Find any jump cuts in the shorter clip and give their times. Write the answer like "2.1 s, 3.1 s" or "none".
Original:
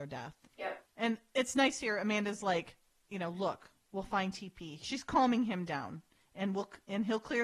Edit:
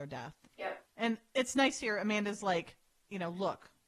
none